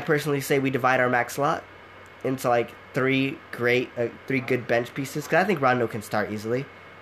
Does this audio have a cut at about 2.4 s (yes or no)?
no